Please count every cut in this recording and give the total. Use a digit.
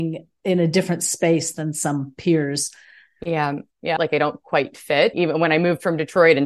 2